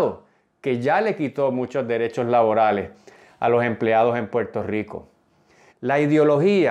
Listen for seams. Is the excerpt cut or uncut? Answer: cut